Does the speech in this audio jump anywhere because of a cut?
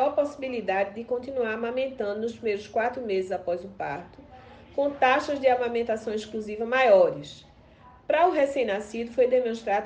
no; 0 cuts

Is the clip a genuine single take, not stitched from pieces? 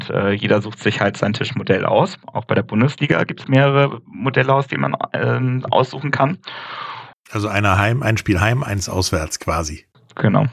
no; 2 cuts; at 3.4 s, 7.1 s

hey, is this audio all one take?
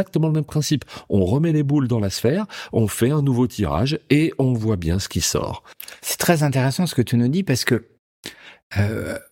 yes; 0 cuts

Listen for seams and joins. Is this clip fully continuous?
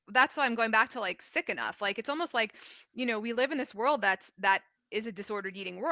yes; 0 cuts

